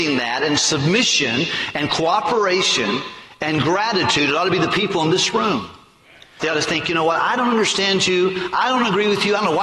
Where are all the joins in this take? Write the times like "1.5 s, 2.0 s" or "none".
6.4 s